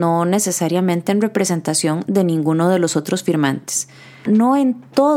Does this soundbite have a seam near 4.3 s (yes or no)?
yes